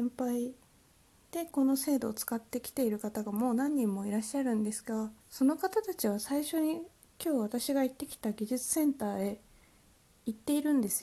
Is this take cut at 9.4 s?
no; 1 cut; at 5.2 s

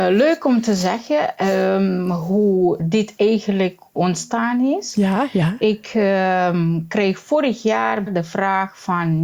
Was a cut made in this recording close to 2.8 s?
yes; 3 cuts; at 2.8 s, 4.0 s, 8.1 s

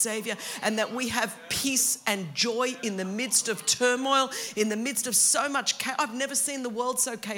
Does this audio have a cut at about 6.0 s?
no; 0 cuts

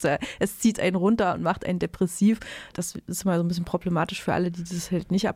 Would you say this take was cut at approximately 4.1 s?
no; 1 cut; at 2.7 s

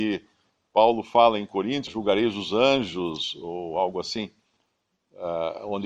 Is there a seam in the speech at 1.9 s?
yes; 1 cut; at 1.9 s

